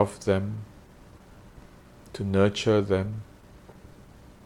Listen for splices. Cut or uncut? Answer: uncut